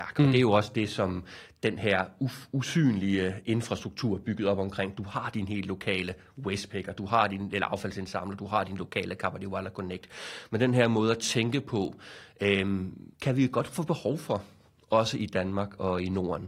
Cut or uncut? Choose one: cut